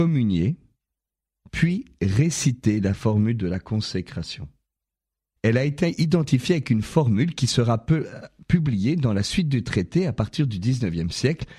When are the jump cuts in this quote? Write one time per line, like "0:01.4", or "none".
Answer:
0:05.4